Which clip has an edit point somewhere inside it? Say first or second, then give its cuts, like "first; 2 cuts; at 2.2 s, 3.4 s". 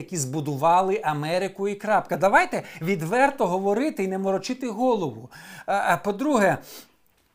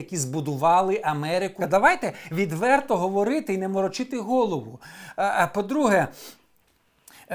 second; 1 cut; at 1.6 s